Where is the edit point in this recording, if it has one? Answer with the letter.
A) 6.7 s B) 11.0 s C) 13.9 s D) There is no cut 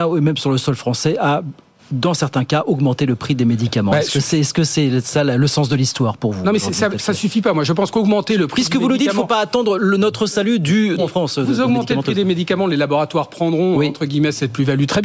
B